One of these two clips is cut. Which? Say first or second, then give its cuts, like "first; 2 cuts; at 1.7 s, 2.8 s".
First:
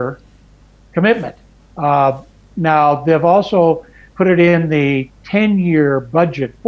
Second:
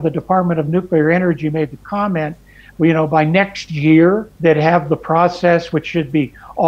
second; 1 cut; at 4.4 s